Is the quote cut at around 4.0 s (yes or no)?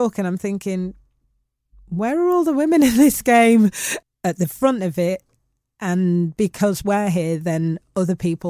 yes